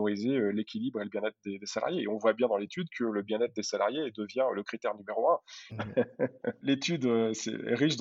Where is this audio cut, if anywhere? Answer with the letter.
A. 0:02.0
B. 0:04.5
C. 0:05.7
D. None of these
C